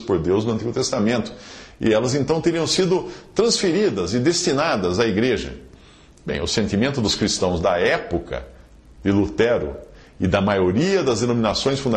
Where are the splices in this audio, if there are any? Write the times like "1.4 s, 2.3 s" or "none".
none